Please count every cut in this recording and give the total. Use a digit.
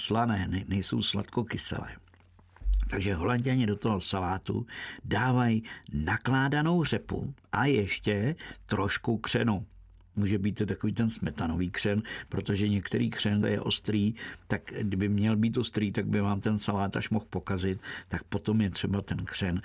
2